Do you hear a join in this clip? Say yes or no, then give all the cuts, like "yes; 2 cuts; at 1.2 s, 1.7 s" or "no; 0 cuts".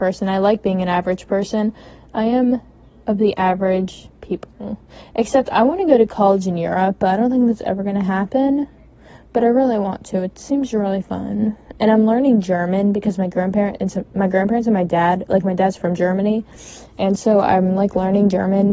no; 0 cuts